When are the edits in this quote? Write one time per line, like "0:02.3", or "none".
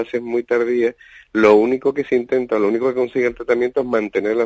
none